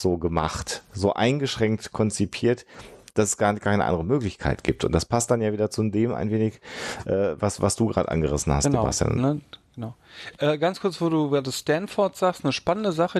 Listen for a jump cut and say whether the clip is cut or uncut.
uncut